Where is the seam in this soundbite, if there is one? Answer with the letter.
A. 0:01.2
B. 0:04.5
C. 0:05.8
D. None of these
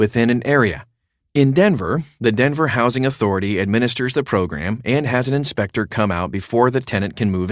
A